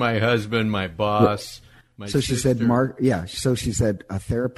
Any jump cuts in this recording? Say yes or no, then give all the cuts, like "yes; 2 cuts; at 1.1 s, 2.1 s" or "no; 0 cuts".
no; 0 cuts